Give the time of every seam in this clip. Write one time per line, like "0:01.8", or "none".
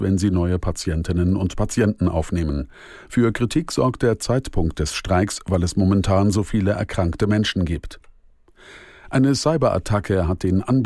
none